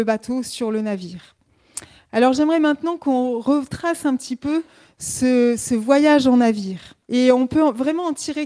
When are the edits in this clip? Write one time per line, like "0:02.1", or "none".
0:07.0